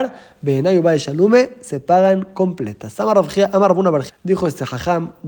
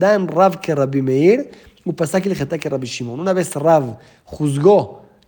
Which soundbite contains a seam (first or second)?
first